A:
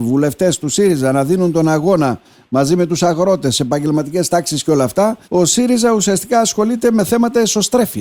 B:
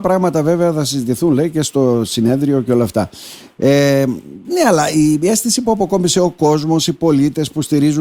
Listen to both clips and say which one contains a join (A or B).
A